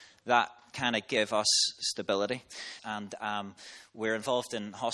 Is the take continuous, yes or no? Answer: no